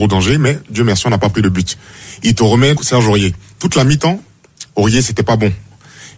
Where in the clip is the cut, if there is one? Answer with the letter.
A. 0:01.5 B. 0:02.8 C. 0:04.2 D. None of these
B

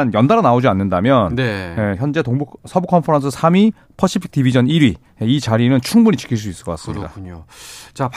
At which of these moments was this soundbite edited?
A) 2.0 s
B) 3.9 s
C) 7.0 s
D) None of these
D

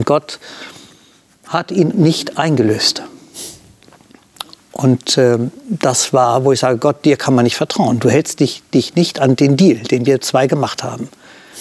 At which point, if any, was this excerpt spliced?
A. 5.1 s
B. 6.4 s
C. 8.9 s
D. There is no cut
D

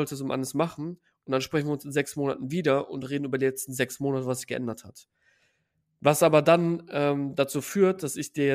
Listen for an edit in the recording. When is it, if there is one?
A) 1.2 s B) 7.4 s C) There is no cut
C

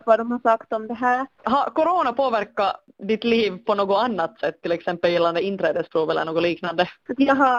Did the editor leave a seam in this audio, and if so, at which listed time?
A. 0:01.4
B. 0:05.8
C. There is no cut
A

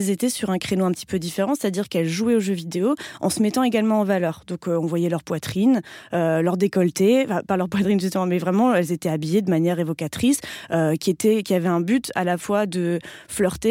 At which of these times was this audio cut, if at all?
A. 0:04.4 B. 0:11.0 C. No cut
C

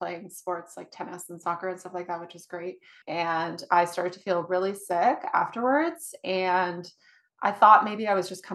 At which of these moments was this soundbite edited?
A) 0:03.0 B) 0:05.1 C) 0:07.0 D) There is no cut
A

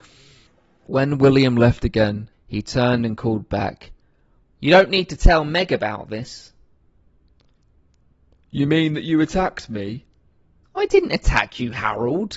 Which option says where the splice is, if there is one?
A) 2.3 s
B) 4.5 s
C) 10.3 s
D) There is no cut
A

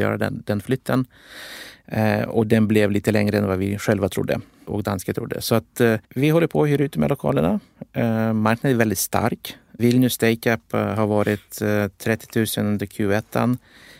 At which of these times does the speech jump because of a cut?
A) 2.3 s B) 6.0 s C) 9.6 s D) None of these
B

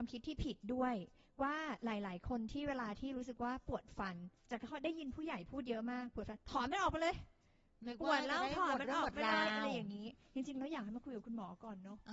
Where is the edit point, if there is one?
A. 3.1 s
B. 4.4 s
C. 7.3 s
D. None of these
B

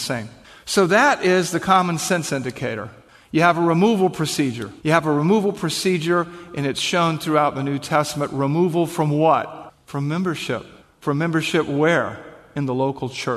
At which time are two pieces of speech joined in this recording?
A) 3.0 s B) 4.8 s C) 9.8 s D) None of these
B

